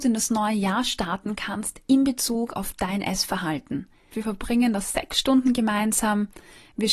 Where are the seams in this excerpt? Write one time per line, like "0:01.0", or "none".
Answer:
0:04.1